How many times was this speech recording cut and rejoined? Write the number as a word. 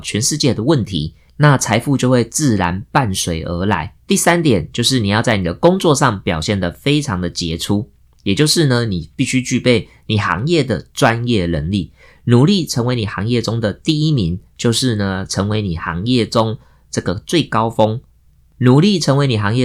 one